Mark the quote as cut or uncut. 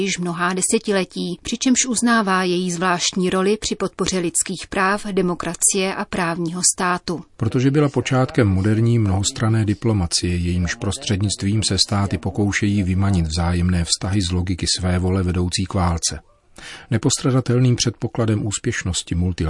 cut